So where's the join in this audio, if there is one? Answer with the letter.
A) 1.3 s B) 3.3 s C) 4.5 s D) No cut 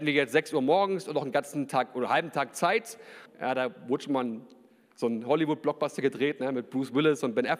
B